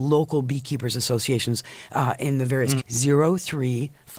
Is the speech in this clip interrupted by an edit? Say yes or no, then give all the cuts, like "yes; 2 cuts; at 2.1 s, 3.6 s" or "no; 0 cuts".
yes; 1 cut; at 2.8 s